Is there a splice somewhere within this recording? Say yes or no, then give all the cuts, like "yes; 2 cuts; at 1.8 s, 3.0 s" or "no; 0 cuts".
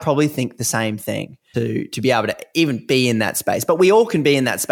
yes; 1 cut; at 1.5 s